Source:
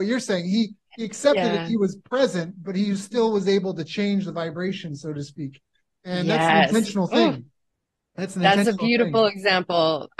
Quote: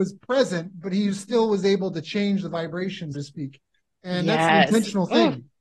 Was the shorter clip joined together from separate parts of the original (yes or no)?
yes